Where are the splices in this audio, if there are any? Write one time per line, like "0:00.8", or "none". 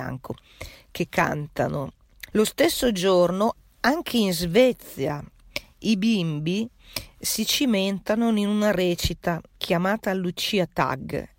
0:02.3
0:09.5